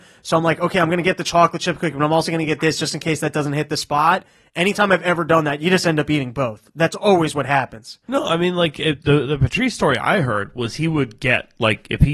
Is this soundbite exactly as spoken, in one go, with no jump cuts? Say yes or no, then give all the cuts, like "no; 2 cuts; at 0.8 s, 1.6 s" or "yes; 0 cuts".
yes; 0 cuts